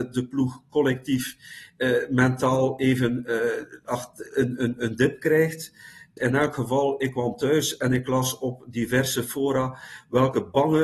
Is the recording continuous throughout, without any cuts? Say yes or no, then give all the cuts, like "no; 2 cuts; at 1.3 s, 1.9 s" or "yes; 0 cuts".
no; 1 cut; at 6.2 s